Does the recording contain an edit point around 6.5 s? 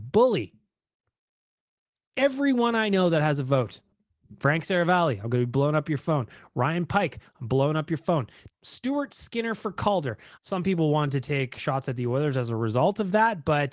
no; 3 cuts; at 8.5 s, 10.4 s, 11.6 s

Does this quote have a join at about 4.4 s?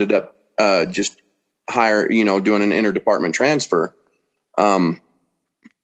no; 0 cuts

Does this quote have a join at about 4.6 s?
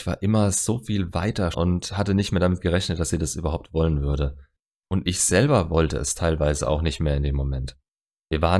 no; 1 cut; at 1.5 s

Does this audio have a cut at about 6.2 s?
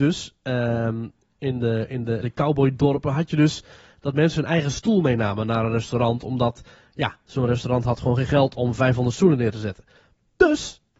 no; 1 cut; at 2.2 s

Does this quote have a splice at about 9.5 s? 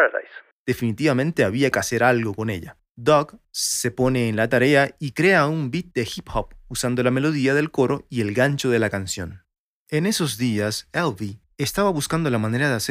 no; 1 cut; at 11.5 s

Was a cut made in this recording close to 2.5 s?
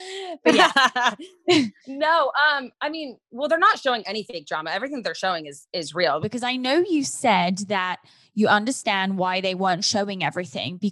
no; 1 cut; at 6.2 s

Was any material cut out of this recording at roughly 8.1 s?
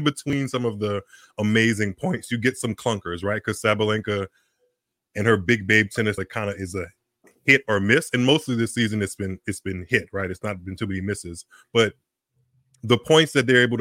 no; 1 cut; at 6.2 s

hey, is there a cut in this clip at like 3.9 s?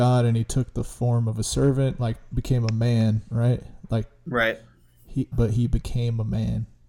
no; 1 cut; at 5.3 s

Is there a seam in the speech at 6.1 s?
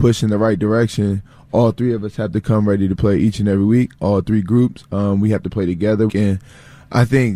yes; 1 cut; at 6.1 s

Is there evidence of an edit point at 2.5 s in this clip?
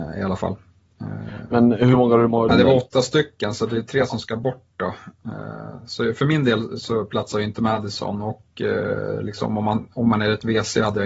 yes; 1 cut; at 2.5 s

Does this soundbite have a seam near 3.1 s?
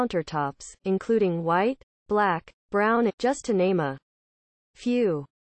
yes; 1 cut; at 3.1 s

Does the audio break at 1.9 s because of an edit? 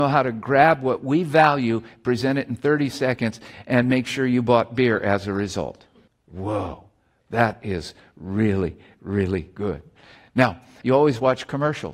no; 2 cuts; at 6.1 s, 10.8 s

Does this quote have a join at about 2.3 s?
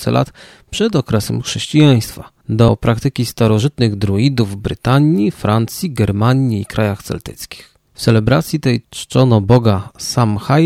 no; 0 cuts

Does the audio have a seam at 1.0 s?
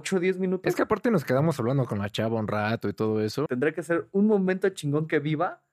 no; 1 cut; at 3.5 s

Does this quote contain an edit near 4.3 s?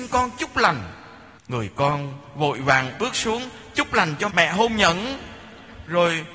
yes; 2 cuts; at 1.4 s, 4.3 s

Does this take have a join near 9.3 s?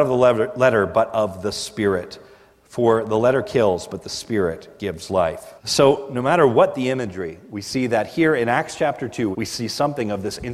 yes; 2 cuts; at 5.6 s, 9.3 s

